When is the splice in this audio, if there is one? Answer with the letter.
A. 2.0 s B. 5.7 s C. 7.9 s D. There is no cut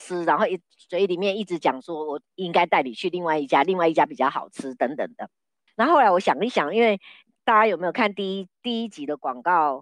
B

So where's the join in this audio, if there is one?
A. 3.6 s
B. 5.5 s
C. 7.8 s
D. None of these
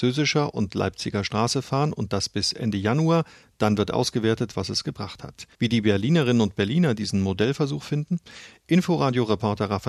B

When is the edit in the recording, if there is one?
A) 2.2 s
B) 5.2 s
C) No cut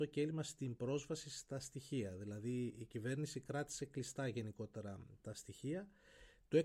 B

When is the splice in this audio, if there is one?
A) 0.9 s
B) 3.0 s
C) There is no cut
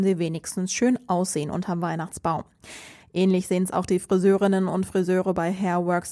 C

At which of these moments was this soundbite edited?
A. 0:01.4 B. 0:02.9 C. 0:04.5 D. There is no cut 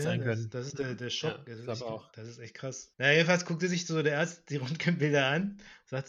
B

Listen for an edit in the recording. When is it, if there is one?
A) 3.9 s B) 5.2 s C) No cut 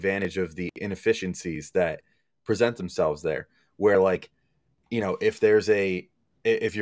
C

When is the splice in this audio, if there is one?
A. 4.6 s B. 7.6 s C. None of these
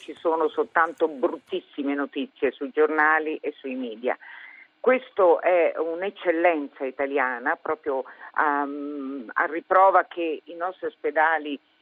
C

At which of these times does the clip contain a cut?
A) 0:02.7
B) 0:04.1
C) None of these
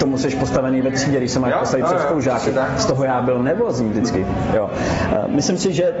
C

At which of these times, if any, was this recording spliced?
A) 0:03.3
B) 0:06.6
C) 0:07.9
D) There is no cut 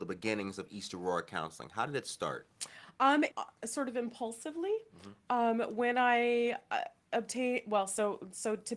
A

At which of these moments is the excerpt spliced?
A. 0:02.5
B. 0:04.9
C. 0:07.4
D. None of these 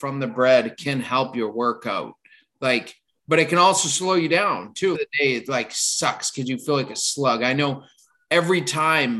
B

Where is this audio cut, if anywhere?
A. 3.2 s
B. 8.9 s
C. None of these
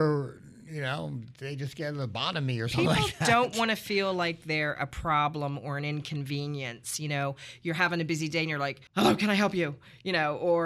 B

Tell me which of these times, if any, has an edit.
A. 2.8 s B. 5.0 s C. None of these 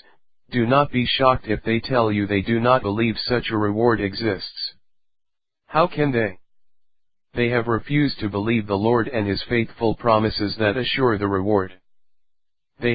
A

